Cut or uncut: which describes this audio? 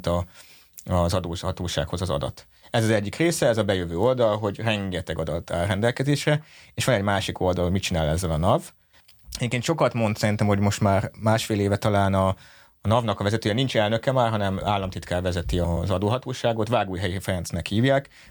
uncut